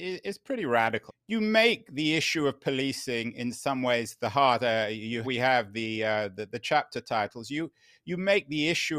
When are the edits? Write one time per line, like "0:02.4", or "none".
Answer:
0:01.1
0:05.2